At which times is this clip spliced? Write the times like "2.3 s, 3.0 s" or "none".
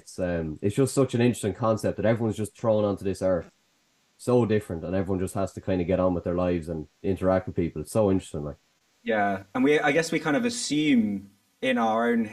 none